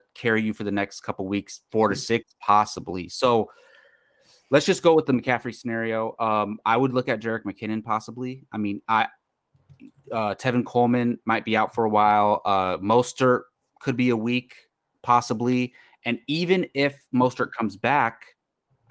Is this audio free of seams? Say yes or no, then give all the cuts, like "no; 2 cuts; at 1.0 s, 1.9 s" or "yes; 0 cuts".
yes; 0 cuts